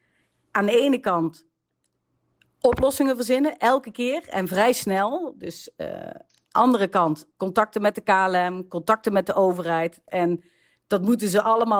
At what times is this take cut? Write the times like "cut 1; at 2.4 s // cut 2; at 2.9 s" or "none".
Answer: cut 1; at 7.3 s // cut 2; at 10.1 s